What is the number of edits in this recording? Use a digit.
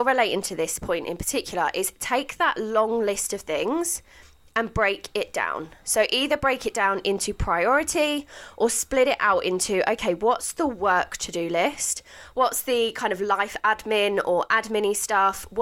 1